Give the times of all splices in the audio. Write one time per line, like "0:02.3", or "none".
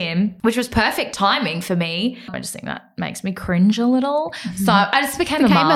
0:02.3

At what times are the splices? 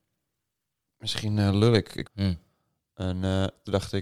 0:02.0

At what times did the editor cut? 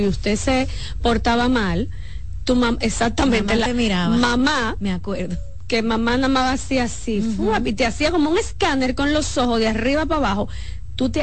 none

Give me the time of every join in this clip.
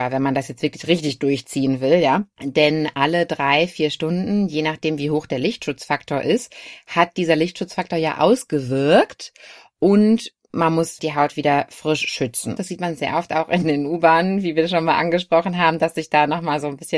0:11.0
0:12.6

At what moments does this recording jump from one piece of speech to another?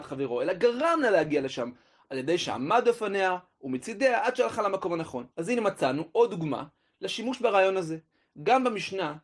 0:05.3

